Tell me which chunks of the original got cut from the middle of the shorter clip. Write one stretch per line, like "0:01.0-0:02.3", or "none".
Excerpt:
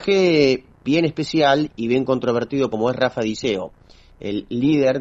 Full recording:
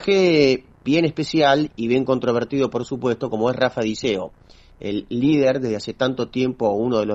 0:02.7-0:03.3

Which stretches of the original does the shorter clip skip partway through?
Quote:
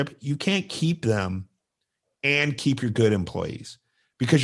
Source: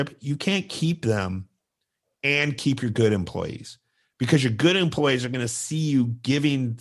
none

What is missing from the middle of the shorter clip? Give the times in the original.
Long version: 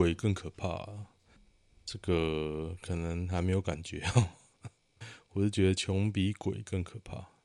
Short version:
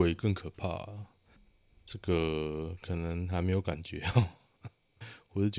none

